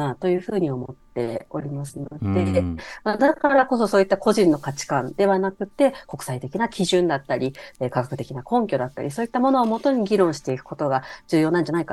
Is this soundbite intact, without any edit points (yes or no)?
yes